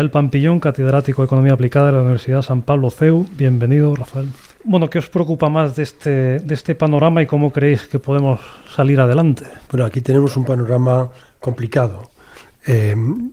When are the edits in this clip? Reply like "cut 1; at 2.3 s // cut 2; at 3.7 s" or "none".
cut 1; at 4.5 s // cut 2; at 9.6 s